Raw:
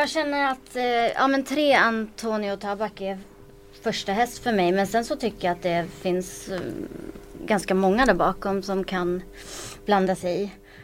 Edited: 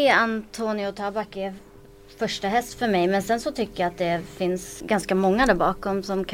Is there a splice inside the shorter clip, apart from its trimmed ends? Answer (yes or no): yes